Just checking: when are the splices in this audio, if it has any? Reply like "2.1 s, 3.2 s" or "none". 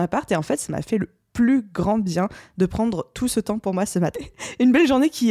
4.1 s

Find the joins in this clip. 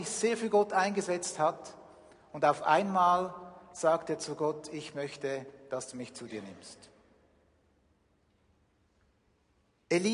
none

